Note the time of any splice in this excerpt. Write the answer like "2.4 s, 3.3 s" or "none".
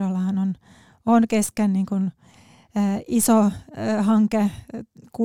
none